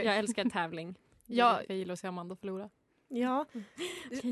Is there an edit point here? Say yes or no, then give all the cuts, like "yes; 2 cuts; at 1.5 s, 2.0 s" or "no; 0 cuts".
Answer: yes; 1 cut; at 1.7 s